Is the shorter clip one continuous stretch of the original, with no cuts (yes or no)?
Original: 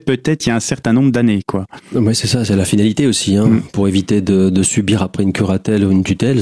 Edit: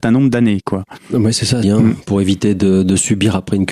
no